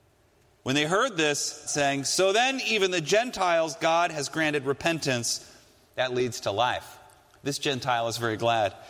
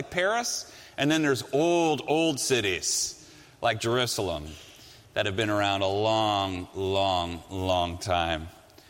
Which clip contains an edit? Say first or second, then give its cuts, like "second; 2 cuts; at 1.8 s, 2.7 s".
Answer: first; 1 cut; at 1.7 s